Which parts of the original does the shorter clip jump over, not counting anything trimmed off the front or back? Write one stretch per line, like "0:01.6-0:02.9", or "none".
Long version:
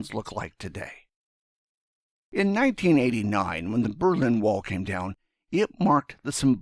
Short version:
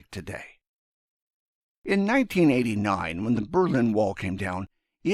none